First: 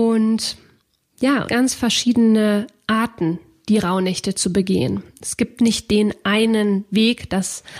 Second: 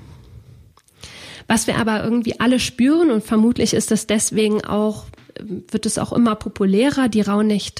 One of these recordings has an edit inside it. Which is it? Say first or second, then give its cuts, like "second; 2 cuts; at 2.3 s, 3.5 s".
first; 1 cut; at 1.4 s